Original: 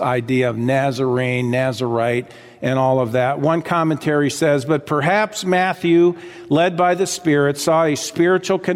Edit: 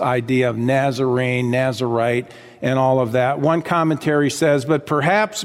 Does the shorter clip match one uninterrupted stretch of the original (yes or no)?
yes